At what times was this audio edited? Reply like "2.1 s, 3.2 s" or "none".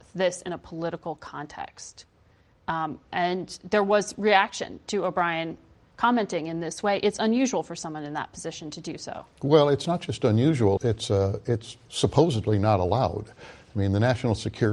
10.8 s